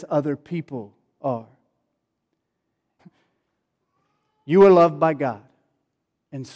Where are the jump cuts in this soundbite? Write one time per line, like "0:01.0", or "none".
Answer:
0:03.0